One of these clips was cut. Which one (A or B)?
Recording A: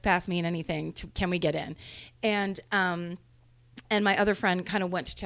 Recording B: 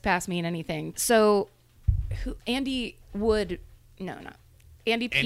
B